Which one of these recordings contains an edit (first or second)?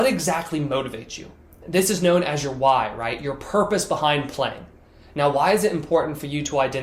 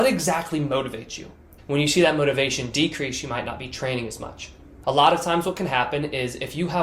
second